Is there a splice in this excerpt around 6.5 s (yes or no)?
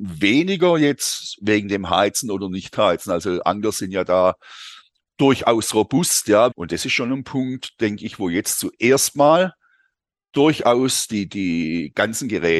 yes